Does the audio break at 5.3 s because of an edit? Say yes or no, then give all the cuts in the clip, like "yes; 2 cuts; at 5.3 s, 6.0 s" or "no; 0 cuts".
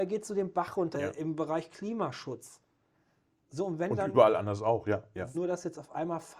yes; 2 cuts; at 0.9 s, 5.3 s